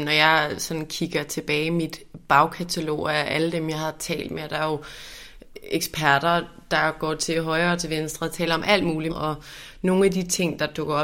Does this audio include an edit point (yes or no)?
yes